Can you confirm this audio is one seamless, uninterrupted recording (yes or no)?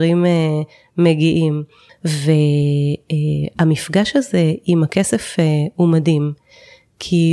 no